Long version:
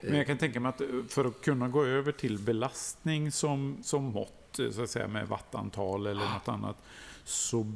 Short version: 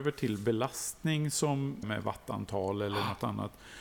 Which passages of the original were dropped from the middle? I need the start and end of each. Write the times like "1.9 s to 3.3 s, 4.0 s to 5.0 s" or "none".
3.8 s to 5.1 s